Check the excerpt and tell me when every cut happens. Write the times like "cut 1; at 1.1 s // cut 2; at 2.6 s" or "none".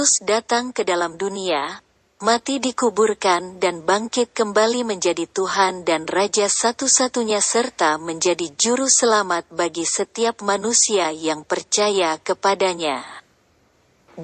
none